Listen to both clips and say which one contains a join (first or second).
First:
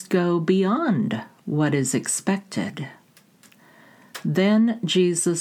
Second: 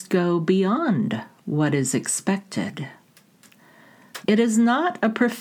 second